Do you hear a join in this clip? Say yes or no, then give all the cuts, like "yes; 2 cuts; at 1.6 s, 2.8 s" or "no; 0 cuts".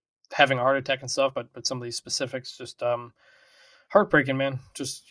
no; 0 cuts